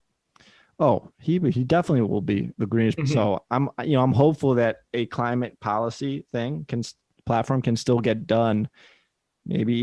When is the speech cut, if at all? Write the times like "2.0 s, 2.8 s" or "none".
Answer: 3.0 s, 7.1 s